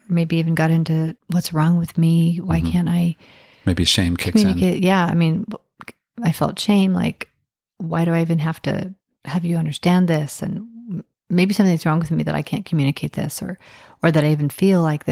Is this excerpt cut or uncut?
cut